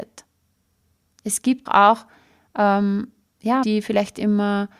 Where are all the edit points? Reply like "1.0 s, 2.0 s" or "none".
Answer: 1.7 s, 3.6 s